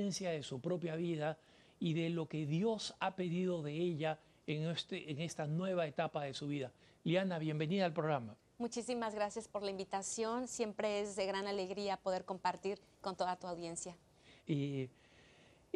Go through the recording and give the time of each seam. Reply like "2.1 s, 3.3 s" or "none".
14.4 s